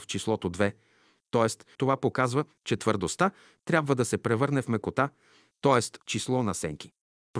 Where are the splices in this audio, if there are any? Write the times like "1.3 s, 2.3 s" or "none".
1.8 s, 6.0 s